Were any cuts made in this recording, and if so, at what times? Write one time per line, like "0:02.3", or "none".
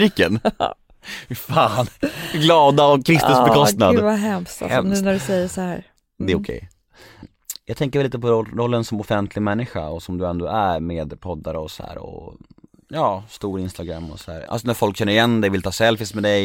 0:07.2
0:14.5